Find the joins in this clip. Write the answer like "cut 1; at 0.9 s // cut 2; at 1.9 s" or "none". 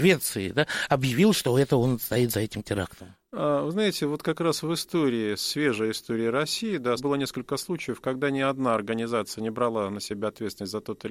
cut 1; at 7.0 s